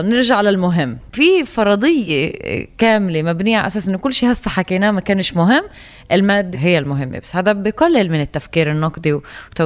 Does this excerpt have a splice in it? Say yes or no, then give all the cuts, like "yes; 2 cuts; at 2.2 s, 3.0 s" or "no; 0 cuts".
yes; 1 cut; at 6.5 s